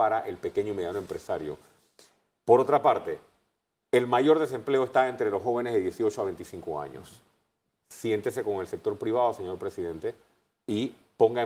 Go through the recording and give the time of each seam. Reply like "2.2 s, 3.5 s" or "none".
none